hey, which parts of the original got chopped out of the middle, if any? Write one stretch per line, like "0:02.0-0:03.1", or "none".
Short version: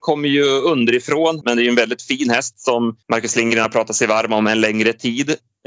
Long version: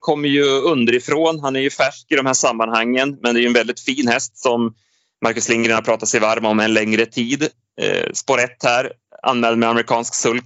0:01.4-0:03.2
0:04.8-0:05.1